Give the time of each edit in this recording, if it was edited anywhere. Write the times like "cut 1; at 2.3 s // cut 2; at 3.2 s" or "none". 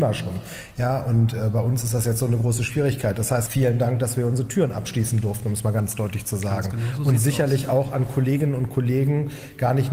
cut 1; at 3.5 s